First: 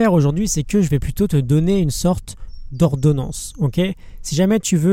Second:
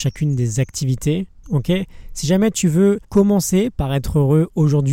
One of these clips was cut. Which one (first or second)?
second